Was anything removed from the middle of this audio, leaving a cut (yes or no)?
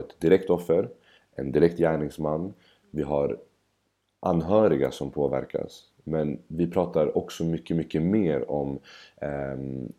no